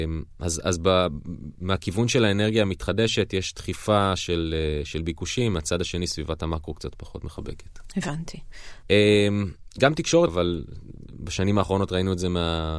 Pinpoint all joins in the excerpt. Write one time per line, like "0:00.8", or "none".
0:08.8
0:10.3